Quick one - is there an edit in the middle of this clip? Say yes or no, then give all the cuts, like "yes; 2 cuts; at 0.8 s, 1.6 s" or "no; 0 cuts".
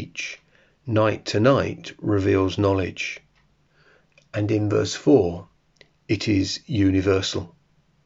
no; 0 cuts